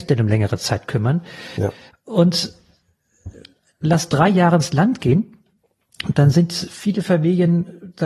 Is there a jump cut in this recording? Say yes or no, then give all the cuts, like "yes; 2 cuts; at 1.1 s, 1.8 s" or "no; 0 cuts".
yes; 1 cut; at 1.9 s